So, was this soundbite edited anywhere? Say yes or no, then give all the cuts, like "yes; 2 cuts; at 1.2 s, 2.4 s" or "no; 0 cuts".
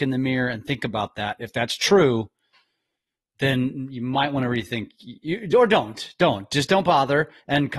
no; 0 cuts